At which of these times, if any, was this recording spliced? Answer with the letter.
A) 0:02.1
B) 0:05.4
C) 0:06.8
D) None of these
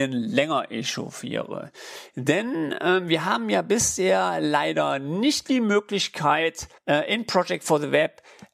C